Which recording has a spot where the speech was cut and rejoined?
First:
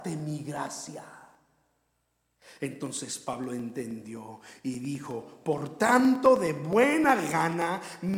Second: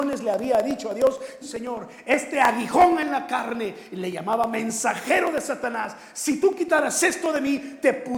second; 1 cut; at 1.4 s

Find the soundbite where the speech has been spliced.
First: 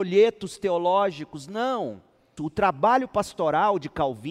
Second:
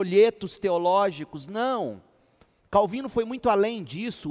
first; 1 cut; at 2.4 s

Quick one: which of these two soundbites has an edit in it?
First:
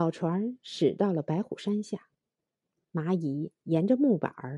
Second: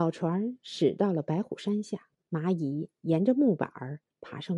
second; 1 cut; at 2.2 s

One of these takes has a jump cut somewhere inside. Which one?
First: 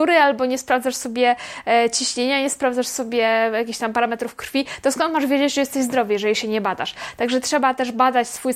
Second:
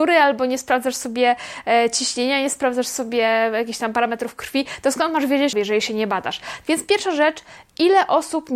second; 2 cuts; at 5.5 s, 6.6 s

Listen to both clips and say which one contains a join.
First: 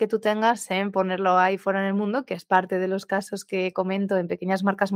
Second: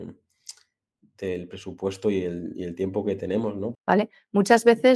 second; 1 cut; at 3.7 s

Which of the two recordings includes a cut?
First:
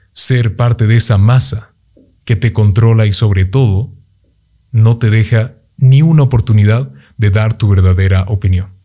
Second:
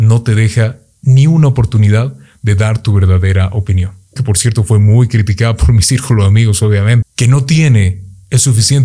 second; 2 cuts; at 4.2 s, 7.0 s

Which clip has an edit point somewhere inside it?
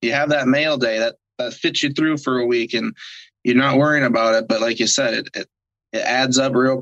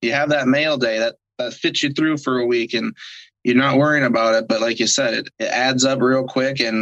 second; 1 cut; at 5.3 s

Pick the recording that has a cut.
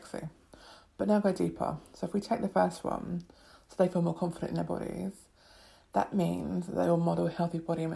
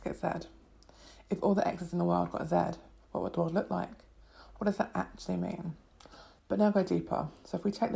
second; 1 cut; at 6.4 s

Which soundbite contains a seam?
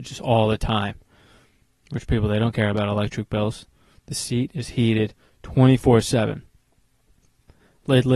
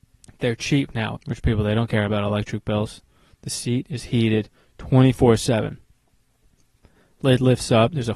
second; 1 cut; at 1.2 s

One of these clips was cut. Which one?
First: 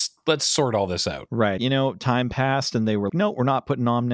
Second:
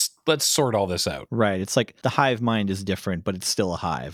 first; 2 cuts; at 1.6 s, 3.1 s

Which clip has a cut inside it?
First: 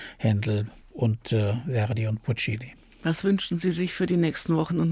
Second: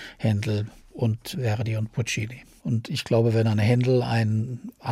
second; 2 cuts; at 1.3 s, 2.6 s

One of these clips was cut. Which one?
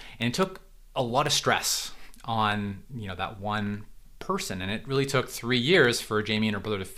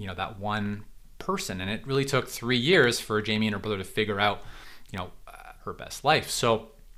second; 1 cut; at 5.6 s

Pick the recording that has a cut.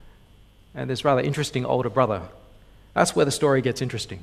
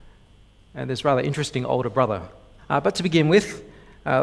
second; 1 cut; at 2.6 s

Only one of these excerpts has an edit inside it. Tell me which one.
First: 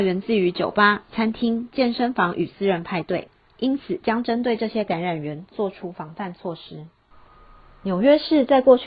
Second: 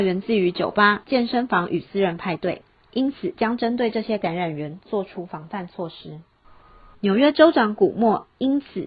second; 2 cuts; at 1.0 s, 6.9 s

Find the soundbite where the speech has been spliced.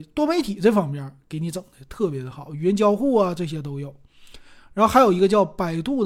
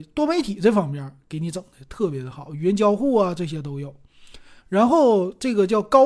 second; 1 cut; at 4.6 s

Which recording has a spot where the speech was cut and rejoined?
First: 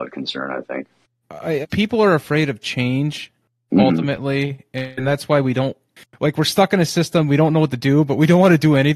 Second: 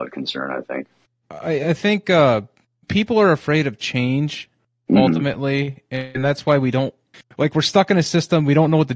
first; 1 cut; at 1.6 s

